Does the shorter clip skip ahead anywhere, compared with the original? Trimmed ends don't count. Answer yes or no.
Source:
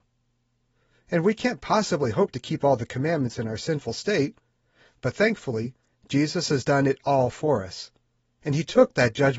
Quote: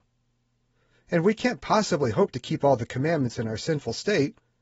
no